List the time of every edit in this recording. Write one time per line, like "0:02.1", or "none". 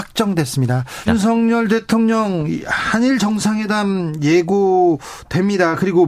0:01.1